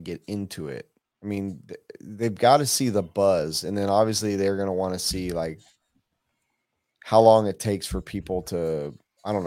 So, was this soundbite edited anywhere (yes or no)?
no